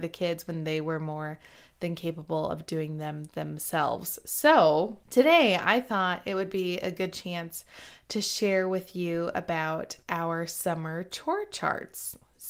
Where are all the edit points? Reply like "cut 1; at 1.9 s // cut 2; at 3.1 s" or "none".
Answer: cut 1; at 5.0 s